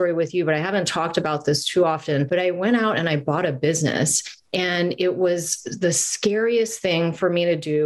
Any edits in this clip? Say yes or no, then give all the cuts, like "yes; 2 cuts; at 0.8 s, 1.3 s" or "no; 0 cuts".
no; 0 cuts